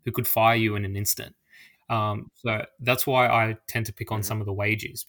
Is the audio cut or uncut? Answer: cut